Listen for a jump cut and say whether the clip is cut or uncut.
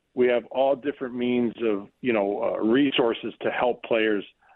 cut